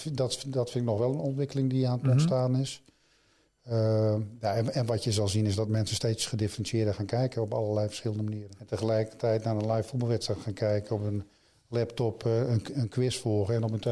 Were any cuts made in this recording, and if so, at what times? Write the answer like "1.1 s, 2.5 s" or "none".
none